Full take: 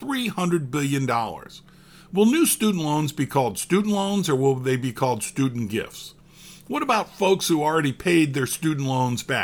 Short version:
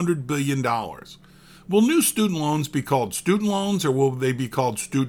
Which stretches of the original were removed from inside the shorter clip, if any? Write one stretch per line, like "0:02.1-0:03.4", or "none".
none

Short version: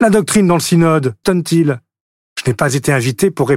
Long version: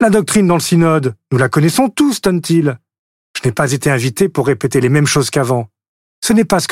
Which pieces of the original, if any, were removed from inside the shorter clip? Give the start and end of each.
0:01.2-0:02.2

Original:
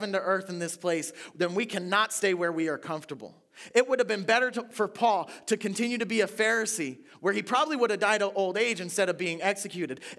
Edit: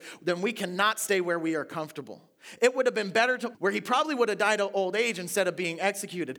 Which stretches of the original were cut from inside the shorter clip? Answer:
0:04.7-0:07.2

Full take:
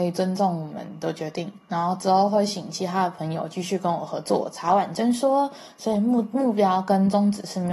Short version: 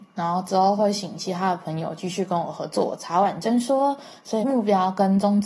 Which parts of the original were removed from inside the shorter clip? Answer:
0:05.9-0:06.3

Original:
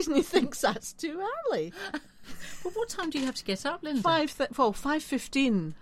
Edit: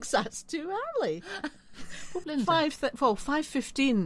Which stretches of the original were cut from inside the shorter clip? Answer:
0:02.7-0:03.8

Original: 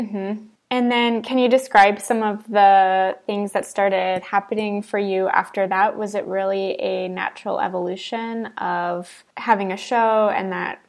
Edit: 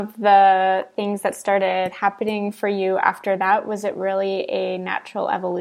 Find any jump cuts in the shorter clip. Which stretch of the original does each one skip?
none

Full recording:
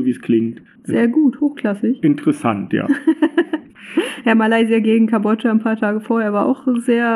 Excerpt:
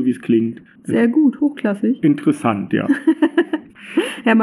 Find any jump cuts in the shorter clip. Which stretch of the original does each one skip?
none

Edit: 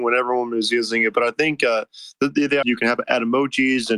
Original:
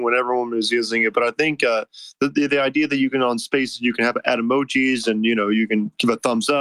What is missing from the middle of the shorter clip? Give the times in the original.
0:02.6-0:03.8

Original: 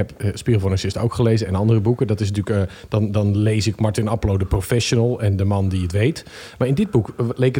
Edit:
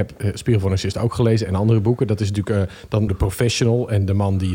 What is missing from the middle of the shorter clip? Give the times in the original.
0:03.1-0:04.4

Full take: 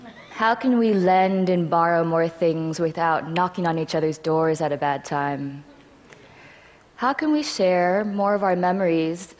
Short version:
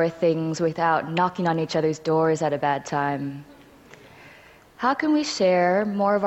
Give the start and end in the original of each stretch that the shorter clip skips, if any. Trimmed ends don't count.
none

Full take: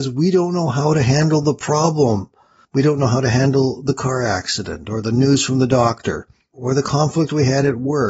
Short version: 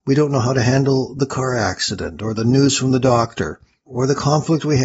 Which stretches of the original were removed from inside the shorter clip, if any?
none

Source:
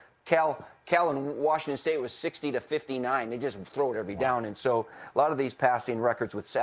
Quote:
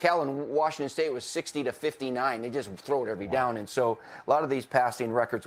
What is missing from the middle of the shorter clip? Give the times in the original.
none

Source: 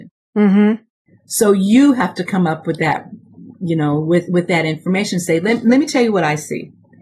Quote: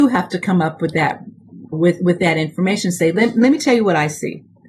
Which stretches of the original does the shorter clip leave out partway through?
0:03.6-0:04.0

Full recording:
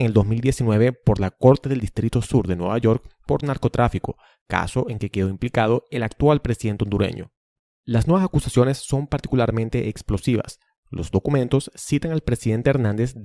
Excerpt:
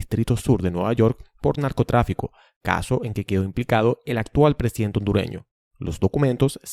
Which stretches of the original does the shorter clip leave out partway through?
0:07.5-0:10.8

